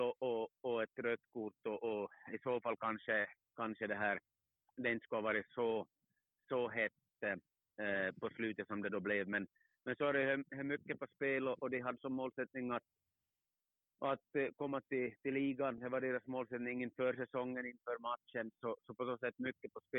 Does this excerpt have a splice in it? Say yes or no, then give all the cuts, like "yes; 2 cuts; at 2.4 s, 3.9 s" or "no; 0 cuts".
no; 0 cuts